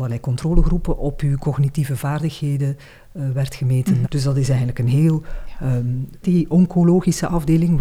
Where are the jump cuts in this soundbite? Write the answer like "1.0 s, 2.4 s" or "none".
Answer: 4.0 s, 6.2 s

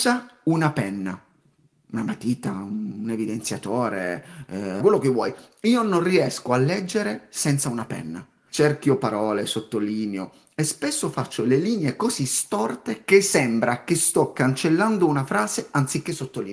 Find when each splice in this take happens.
4.8 s, 8.5 s

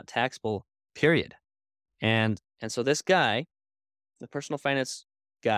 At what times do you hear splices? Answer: none

